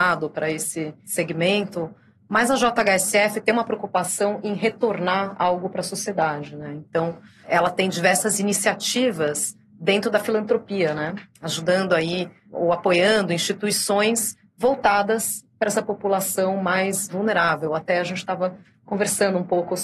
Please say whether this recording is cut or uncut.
uncut